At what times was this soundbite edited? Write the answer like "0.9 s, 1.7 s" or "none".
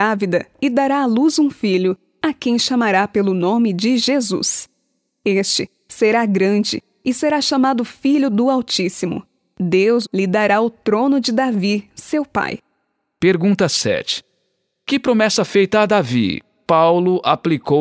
10.0 s